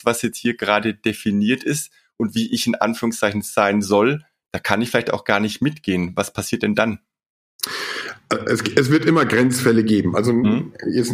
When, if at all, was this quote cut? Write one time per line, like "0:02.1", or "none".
none